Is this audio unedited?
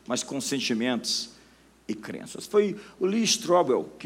yes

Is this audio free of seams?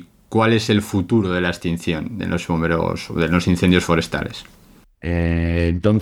no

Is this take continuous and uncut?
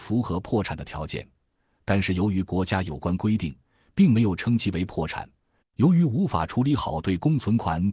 no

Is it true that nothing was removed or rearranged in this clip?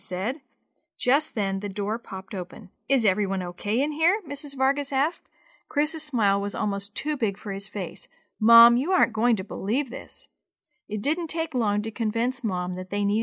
yes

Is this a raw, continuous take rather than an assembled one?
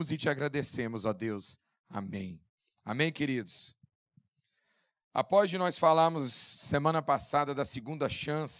yes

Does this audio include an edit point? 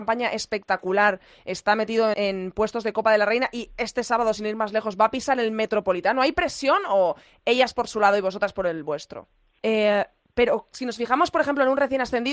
yes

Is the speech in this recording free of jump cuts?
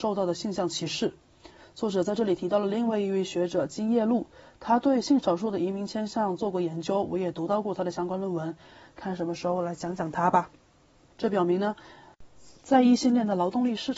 no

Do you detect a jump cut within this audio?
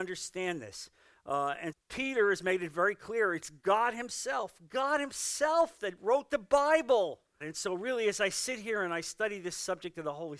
yes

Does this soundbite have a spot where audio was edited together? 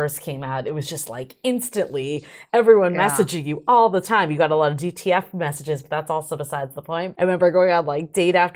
yes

